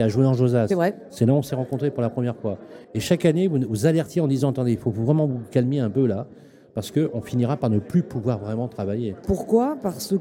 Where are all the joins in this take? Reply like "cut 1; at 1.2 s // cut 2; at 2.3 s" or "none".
cut 1; at 2.8 s // cut 2; at 9.2 s